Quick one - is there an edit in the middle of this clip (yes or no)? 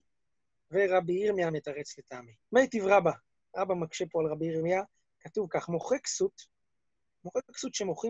yes